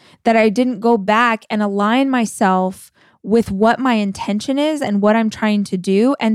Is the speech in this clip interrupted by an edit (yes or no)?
no